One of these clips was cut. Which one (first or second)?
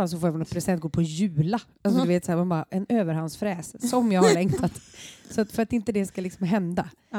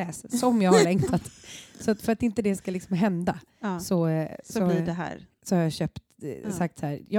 first